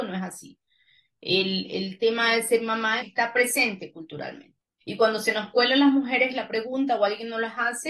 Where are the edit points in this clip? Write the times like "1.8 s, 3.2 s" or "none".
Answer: 3.0 s, 4.8 s